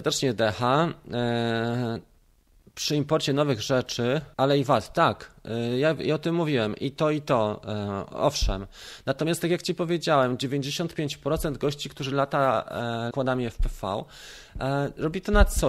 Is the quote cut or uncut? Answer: cut